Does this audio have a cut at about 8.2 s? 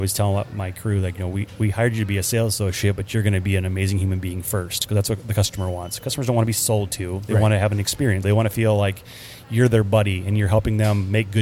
yes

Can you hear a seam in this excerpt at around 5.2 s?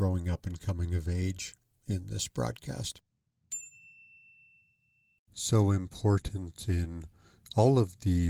yes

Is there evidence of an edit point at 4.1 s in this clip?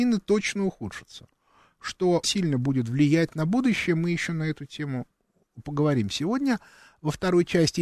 no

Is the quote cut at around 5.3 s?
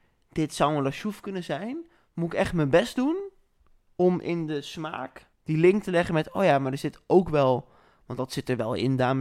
yes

